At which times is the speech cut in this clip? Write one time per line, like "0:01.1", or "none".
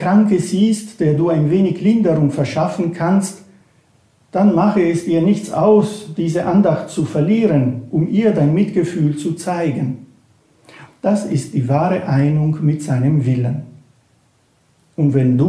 0:10.9